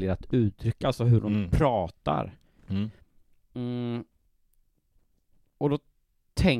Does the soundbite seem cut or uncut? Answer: uncut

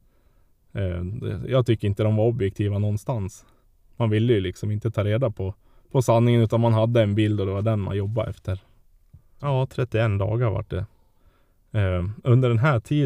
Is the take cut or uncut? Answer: cut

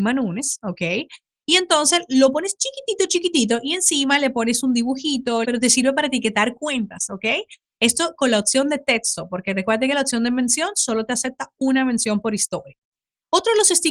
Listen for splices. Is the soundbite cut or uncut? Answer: cut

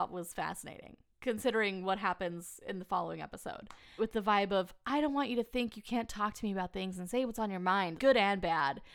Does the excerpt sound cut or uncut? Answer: cut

